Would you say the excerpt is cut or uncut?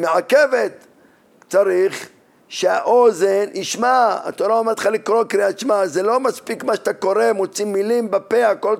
uncut